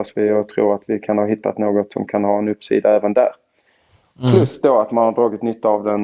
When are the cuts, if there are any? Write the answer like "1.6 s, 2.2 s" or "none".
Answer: none

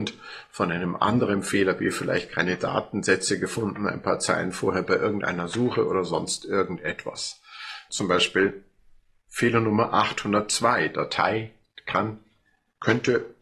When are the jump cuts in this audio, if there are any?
7.9 s

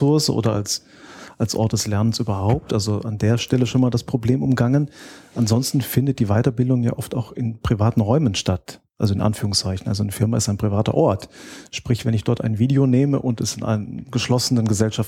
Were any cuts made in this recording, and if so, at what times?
none

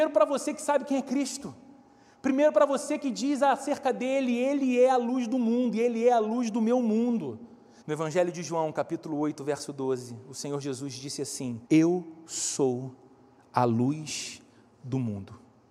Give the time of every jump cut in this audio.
7.8 s, 11.7 s

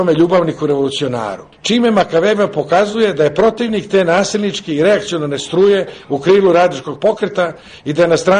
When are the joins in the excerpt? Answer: 1.5 s

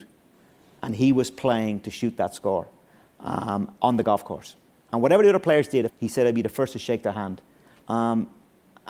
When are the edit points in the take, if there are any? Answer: 5.9 s, 7.8 s

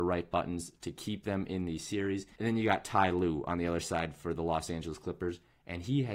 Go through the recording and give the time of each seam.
2.4 s

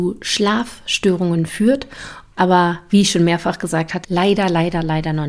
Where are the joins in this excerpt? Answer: 2.3 s, 4.0 s

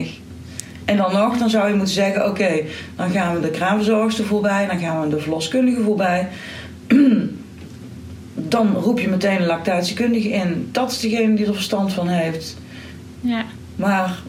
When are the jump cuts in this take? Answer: 13.2 s

